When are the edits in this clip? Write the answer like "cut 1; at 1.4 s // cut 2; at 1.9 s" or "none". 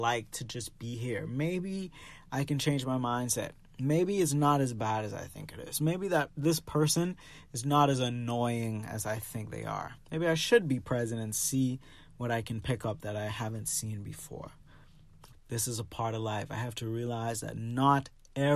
cut 1; at 10.0 s // cut 2; at 15.3 s